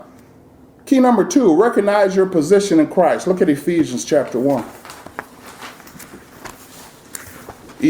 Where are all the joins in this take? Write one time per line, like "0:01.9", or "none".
none

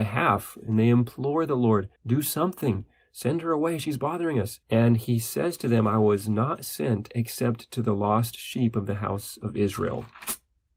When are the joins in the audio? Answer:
0:02.0
0:04.6

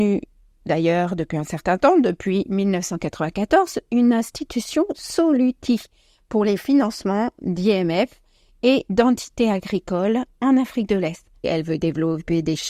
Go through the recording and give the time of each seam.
0:11.4

